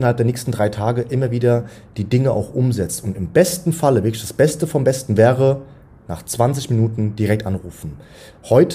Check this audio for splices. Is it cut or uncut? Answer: uncut